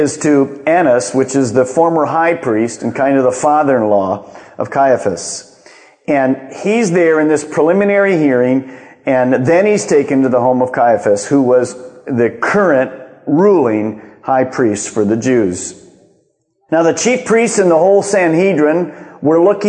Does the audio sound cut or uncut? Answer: uncut